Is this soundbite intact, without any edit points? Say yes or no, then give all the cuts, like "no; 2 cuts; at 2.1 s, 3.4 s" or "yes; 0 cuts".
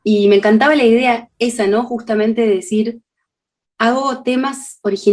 yes; 0 cuts